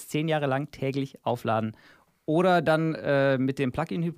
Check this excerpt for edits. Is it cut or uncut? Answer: uncut